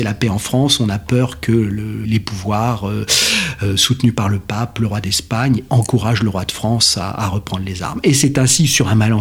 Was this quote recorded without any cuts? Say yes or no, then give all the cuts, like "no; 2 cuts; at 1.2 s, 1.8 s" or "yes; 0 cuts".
no; 2 cuts; at 2.0 s, 5.7 s